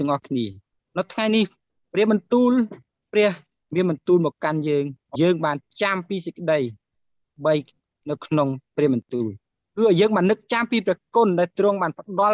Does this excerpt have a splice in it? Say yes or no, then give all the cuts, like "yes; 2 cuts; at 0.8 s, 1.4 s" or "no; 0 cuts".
yes; 1 cut; at 5.1 s